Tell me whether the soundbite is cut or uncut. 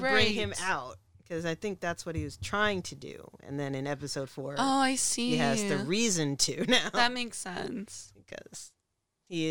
uncut